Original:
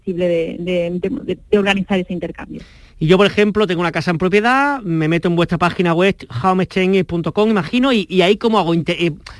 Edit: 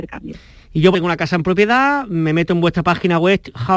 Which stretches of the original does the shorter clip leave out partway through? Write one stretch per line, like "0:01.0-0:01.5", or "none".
0:03.2-0:03.7